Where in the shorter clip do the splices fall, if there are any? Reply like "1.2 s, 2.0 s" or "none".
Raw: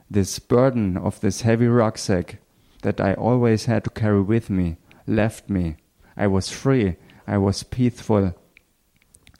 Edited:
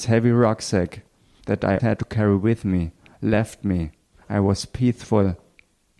1.8 s, 4.2 s